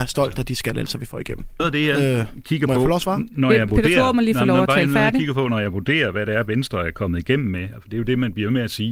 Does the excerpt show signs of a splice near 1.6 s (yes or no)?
yes